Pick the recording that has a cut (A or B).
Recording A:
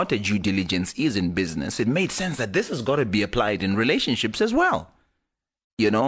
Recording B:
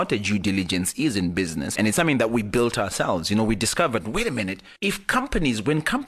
B